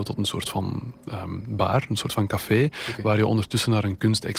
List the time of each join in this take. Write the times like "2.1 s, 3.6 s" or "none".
none